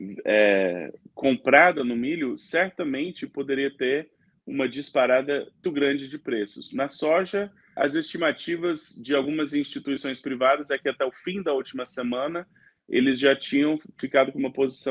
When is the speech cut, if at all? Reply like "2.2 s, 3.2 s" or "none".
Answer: 5.6 s, 7.8 s